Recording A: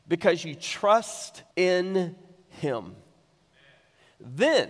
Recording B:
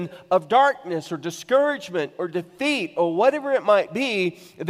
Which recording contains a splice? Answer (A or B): A